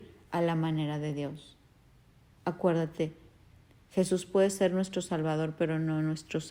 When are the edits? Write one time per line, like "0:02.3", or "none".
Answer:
none